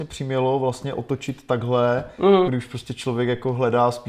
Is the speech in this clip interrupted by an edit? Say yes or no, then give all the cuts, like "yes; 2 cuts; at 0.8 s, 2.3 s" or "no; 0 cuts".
yes; 1 cut; at 2.5 s